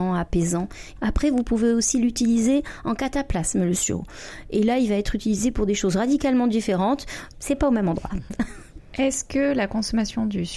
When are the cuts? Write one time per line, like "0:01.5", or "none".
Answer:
0:01.0
0:07.3